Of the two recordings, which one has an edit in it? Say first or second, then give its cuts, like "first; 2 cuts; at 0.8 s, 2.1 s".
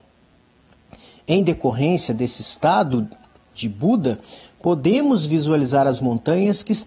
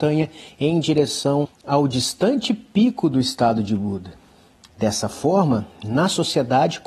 second; 2 cuts; at 1.4 s, 4.7 s